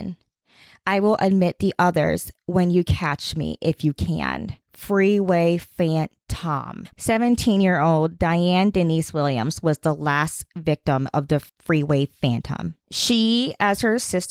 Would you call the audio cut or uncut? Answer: cut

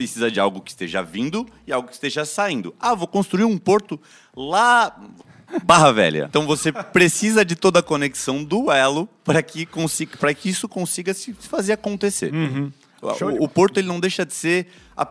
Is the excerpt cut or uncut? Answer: uncut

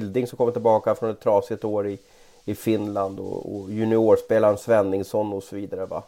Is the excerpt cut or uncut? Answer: uncut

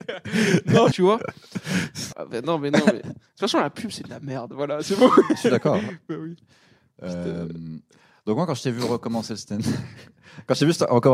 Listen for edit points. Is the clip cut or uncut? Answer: cut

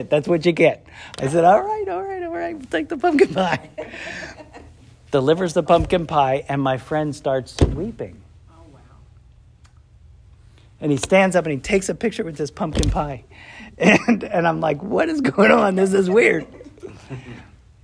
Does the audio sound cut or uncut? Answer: uncut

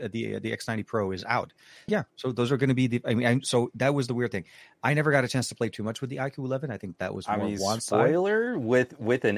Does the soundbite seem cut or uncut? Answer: cut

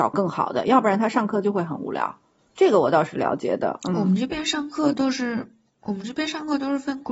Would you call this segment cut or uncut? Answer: uncut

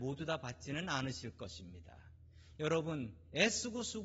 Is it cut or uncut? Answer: cut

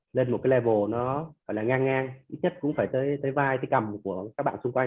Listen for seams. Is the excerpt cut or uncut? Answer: cut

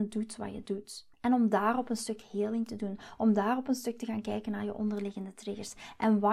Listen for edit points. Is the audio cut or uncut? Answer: cut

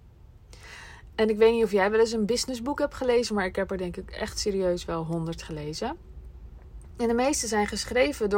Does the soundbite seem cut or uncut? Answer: cut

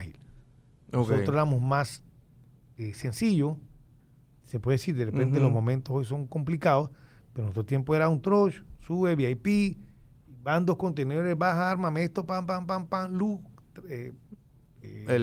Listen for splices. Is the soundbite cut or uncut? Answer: uncut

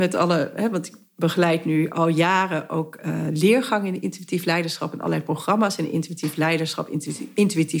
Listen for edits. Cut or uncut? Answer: uncut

